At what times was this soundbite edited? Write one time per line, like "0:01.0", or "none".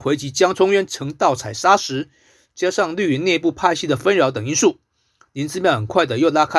none